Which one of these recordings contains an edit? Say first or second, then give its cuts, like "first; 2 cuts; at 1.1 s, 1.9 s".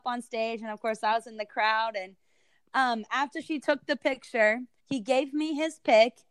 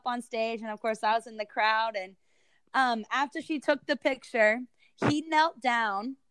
first; 1 cut; at 4.8 s